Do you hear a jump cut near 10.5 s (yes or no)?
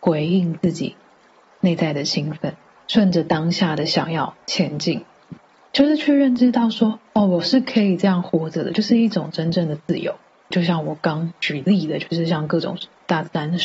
yes